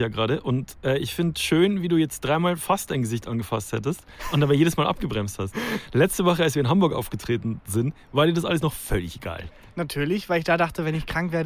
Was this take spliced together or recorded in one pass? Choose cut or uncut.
uncut